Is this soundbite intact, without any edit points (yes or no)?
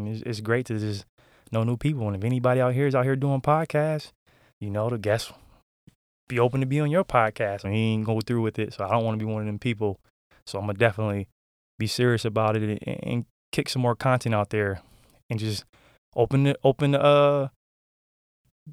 no